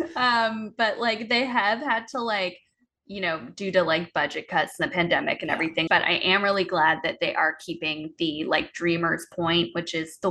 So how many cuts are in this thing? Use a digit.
1